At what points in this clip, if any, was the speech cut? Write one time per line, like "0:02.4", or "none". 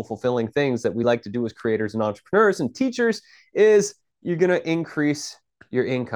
none